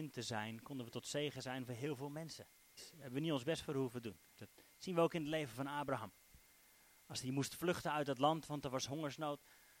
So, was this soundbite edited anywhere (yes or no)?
yes